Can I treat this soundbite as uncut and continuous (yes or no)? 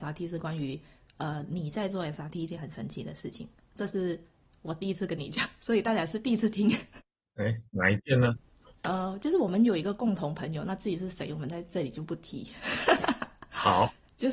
yes